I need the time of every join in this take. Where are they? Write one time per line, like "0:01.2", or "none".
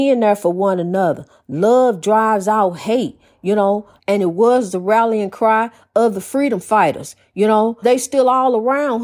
0:04.0
0:07.8